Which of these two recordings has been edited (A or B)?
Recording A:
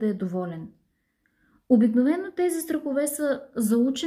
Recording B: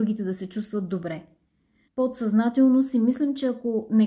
B